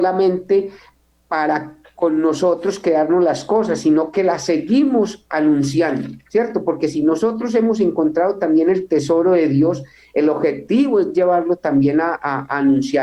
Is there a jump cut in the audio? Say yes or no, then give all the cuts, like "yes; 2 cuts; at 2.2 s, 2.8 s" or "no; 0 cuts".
no; 0 cuts